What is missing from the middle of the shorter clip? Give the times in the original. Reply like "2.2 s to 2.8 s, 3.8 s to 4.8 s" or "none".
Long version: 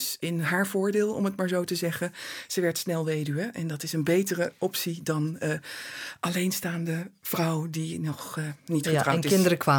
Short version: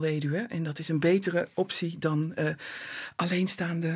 none